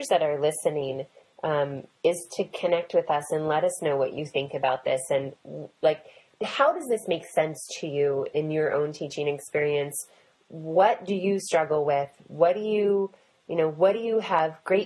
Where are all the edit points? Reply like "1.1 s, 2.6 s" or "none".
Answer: none